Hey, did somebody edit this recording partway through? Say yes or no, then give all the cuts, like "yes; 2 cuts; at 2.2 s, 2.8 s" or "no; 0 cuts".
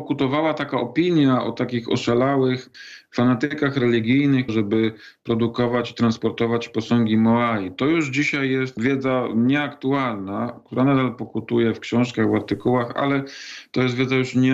yes; 1 cut; at 4.5 s